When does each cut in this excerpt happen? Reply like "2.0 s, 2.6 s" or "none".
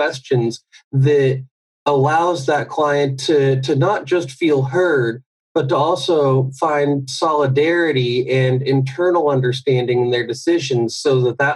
none